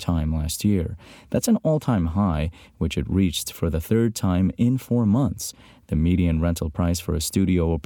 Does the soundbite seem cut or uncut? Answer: uncut